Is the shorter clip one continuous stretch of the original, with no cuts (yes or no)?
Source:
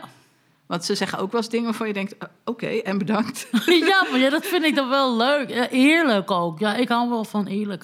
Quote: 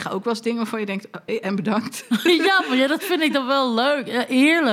no